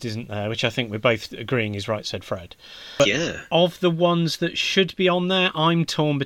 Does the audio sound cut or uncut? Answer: uncut